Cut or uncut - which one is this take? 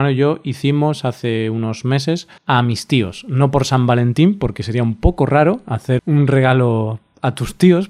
cut